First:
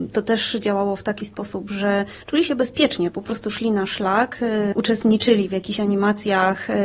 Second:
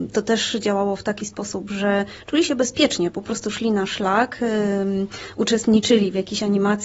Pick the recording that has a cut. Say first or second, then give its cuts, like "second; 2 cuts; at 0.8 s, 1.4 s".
first; 1 cut; at 4.7 s